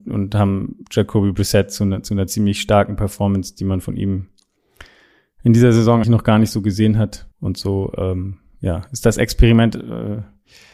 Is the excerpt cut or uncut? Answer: cut